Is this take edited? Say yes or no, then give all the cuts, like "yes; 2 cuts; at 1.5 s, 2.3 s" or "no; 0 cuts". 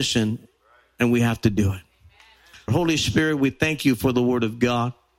yes; 1 cut; at 2.7 s